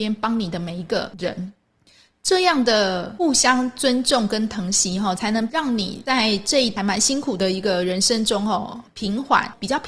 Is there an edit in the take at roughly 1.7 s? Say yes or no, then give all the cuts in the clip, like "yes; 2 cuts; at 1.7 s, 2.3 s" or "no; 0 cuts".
no; 0 cuts